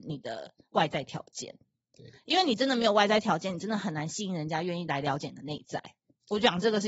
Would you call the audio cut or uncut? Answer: uncut